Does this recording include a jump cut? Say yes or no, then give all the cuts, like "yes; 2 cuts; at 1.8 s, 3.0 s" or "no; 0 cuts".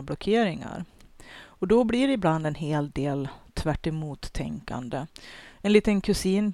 no; 0 cuts